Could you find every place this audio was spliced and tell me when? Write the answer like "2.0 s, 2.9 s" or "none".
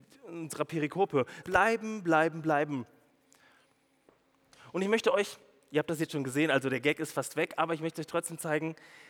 1.4 s